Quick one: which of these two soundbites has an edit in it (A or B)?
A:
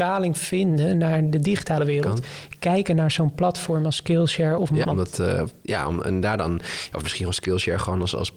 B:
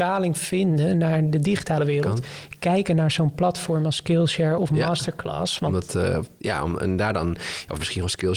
A